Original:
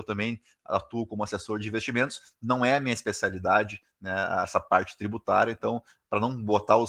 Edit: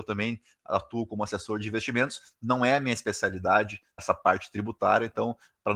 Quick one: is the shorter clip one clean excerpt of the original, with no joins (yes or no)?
no